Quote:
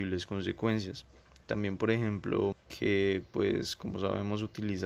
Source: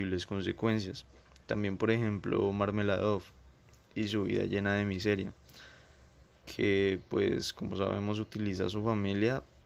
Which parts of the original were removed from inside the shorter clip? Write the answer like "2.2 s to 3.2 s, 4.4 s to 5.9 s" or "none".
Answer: 2.5 s to 6.3 s

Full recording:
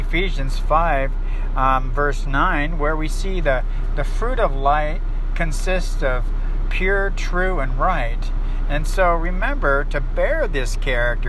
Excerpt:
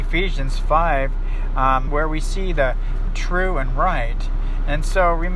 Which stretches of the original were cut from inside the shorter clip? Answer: 1.9 s to 2.8 s, 4.0 s to 7.1 s

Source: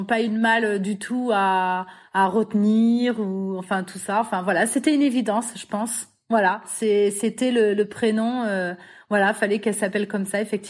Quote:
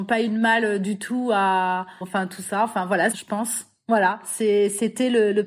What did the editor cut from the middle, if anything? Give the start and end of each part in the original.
2.0 s to 3.6 s, 4.7 s to 5.5 s

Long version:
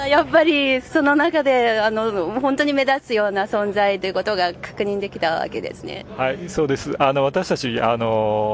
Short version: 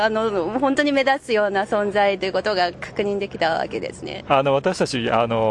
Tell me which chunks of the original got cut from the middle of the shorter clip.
6.1 s to 7.0 s

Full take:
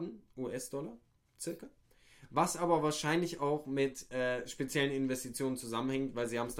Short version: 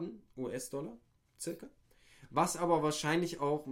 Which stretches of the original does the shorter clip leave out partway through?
none

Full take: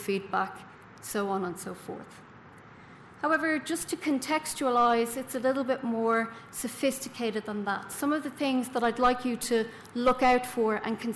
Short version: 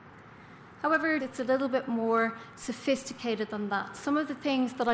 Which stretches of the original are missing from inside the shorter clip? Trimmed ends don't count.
3.6 s to 5.1 s

